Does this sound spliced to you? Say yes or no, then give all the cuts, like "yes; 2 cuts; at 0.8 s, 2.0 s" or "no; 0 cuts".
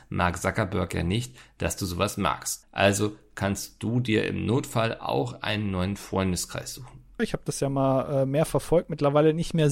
yes; 2 cuts; at 2.6 s, 7.2 s